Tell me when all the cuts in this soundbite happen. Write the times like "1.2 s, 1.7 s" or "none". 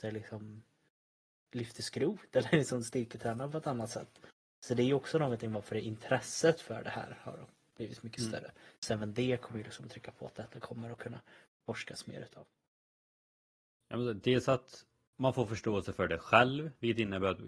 none